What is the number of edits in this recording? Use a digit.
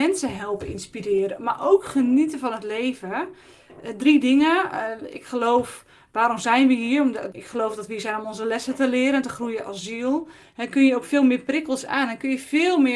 2